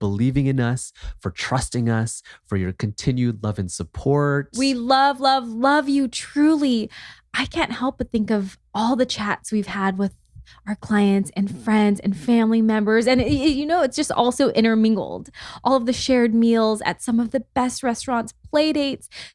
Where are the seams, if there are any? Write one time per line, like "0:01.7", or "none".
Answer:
none